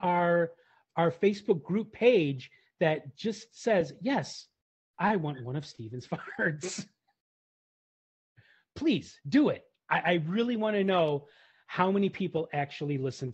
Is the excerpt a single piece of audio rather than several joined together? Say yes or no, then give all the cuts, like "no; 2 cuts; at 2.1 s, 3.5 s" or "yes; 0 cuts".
yes; 0 cuts